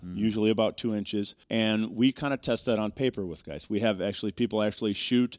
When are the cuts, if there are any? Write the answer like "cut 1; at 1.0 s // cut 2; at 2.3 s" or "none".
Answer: cut 1; at 1.4 s